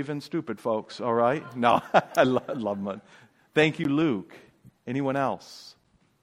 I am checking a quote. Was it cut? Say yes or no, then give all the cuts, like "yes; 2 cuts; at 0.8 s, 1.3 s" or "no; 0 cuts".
no; 0 cuts